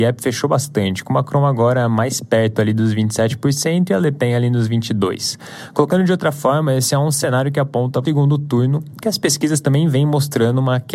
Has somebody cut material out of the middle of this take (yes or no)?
yes